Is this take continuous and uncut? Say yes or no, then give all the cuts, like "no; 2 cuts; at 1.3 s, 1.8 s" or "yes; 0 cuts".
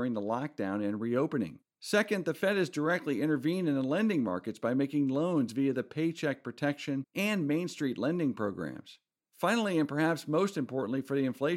no; 1 cut; at 1.7 s